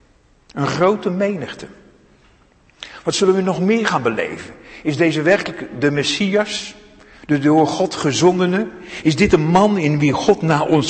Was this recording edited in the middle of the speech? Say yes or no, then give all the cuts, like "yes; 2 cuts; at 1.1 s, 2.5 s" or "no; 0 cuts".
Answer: no; 0 cuts